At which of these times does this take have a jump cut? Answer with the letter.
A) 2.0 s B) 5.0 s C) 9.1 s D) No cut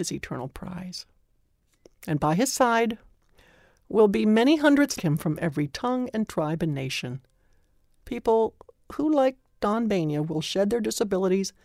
B